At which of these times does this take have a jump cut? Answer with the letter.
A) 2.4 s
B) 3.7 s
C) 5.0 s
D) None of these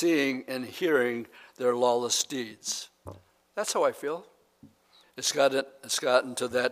C